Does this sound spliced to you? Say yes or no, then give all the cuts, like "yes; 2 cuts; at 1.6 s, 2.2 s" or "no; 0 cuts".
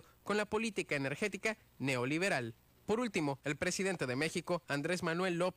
no; 0 cuts